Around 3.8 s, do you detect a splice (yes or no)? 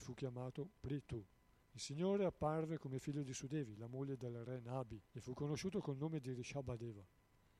no